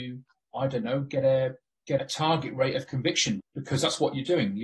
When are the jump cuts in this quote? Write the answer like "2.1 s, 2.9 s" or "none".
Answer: 2.0 s, 3.4 s

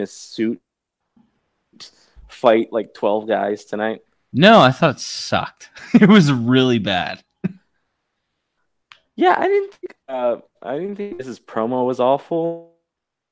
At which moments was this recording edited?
none

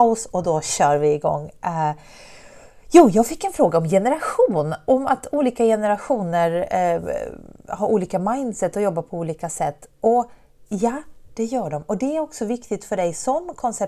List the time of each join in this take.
none

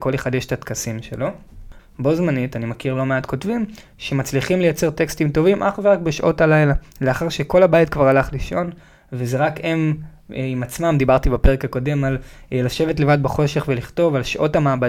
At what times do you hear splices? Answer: 1.8 s

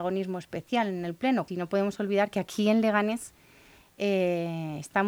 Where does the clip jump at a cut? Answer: 1.5 s

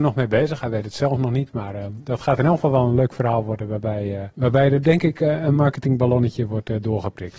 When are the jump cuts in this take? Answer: 4.3 s

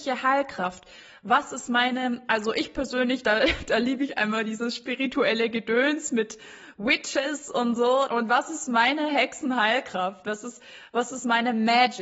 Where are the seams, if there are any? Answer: 8.1 s

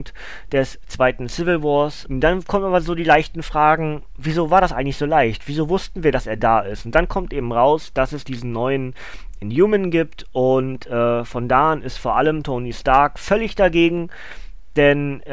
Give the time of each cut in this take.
2.1 s

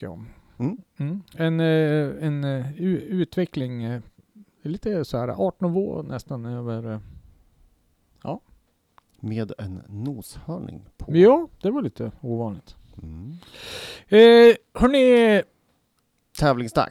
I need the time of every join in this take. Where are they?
none

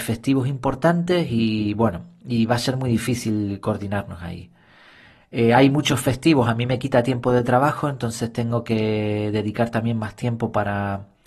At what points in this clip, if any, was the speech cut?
none

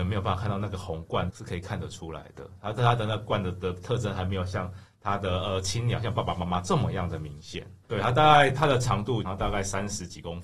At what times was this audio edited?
1.3 s, 7.9 s, 9.2 s

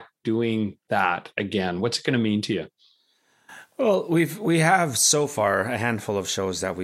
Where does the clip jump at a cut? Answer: none

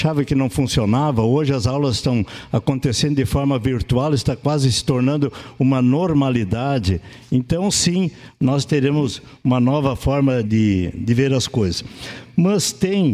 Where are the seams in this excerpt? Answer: 10.4 s

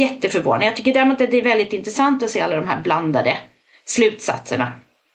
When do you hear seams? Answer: none

